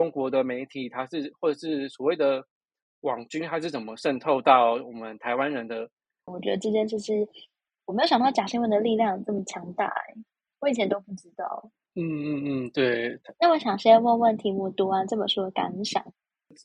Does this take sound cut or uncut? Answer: cut